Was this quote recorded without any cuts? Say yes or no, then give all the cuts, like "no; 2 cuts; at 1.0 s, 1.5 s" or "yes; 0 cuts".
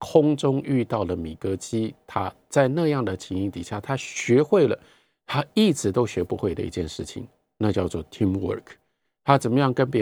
yes; 0 cuts